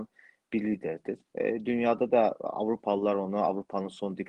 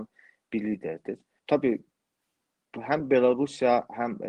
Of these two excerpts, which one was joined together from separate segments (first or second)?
first